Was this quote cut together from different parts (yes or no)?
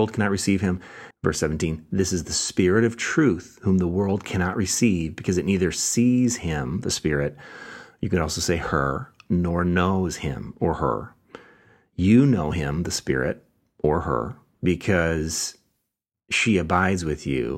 yes